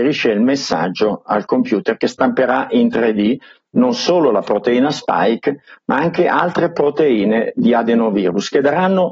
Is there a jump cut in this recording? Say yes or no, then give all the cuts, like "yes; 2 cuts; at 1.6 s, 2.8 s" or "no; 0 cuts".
no; 0 cuts